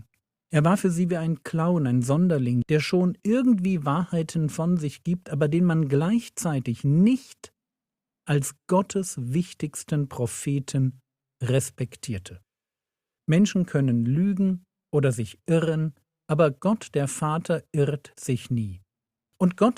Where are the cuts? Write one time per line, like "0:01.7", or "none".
0:02.6
0:13.2